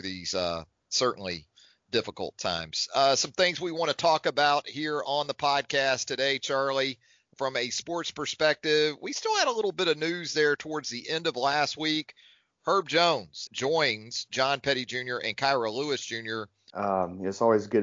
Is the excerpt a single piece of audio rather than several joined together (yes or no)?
no